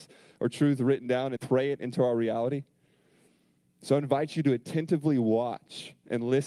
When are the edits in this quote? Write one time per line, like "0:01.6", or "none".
0:01.4